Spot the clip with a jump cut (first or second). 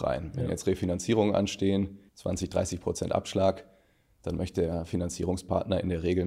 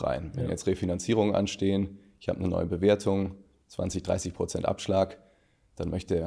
first